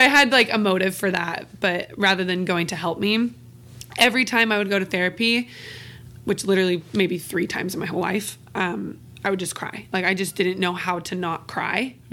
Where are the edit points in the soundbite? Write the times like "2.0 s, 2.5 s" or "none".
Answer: 6.2 s